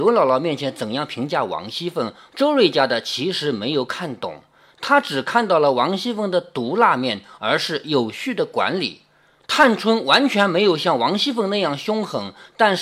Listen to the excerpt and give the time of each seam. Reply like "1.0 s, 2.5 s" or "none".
2.3 s, 7.4 s, 9.4 s